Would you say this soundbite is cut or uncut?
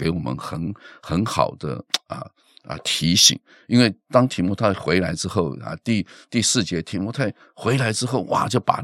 uncut